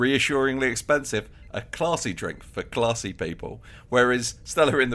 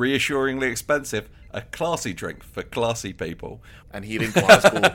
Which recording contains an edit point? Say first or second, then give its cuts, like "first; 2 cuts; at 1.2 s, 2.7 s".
second; 1 cut; at 3.8 s